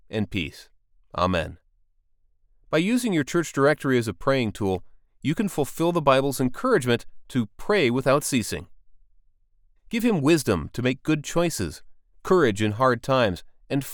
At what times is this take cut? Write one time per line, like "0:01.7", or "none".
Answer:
0:09.8